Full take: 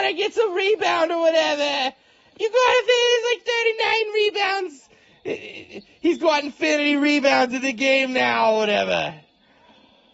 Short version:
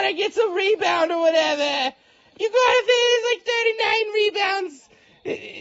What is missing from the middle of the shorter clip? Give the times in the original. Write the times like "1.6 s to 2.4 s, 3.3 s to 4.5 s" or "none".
none